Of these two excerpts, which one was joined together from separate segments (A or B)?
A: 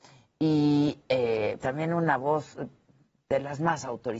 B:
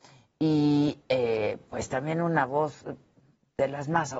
A